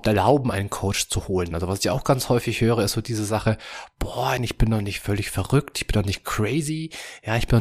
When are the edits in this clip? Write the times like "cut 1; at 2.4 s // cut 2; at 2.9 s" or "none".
cut 1; at 1.5 s // cut 2; at 4.4 s